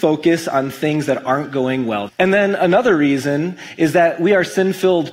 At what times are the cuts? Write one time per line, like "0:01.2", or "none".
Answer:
0:02.1